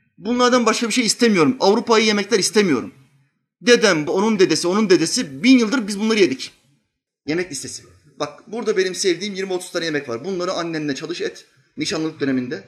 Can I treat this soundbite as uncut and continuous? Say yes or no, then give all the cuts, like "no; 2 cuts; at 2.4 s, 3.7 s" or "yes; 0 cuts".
no; 2 cuts; at 4.1 s, 7.1 s